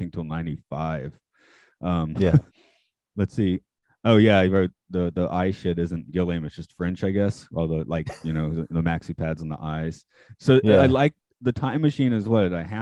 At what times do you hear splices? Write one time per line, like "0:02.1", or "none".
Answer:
0:02.5